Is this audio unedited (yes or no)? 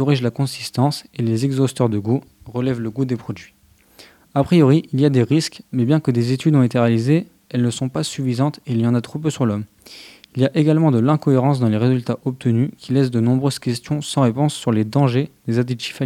yes